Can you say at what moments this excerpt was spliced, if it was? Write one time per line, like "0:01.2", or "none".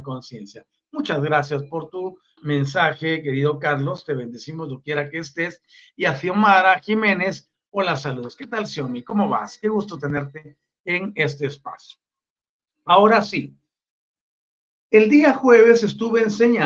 0:02.4